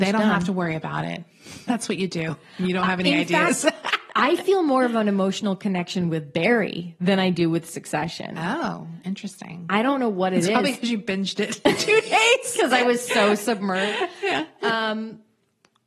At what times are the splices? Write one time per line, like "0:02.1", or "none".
none